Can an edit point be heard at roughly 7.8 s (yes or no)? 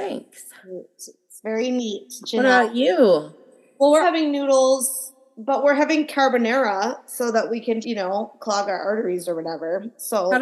yes